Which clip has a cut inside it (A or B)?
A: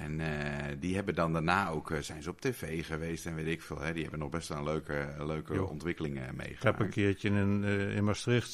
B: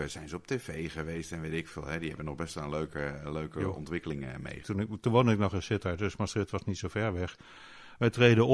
B